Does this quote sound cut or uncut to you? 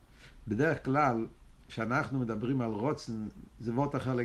uncut